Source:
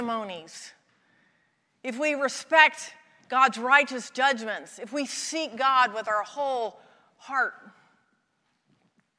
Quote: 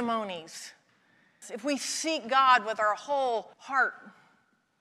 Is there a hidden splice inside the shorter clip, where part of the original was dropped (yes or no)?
yes